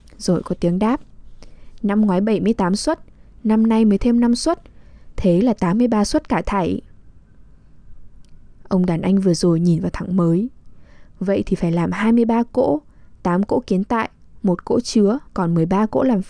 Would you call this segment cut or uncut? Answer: cut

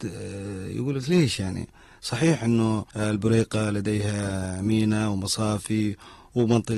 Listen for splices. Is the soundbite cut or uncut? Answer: cut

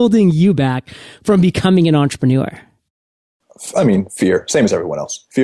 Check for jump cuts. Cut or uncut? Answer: uncut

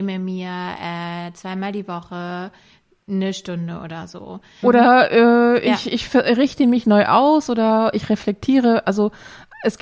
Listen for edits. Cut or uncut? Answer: cut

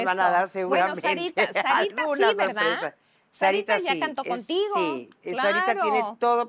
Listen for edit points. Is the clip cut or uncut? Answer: uncut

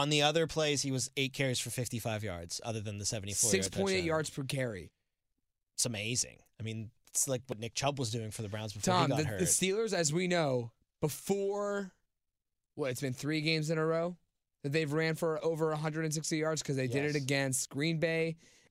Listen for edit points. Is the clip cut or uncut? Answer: uncut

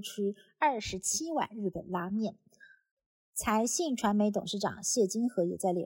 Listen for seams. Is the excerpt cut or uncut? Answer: uncut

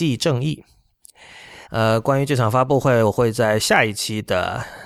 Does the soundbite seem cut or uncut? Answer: cut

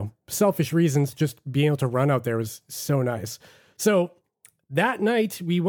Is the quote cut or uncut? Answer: uncut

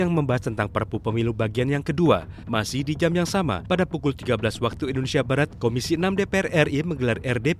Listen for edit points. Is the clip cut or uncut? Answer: cut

